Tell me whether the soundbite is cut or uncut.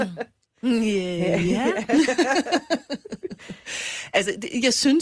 uncut